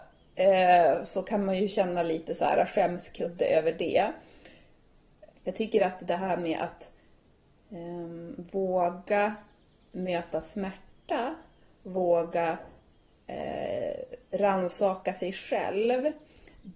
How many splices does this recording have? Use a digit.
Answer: 1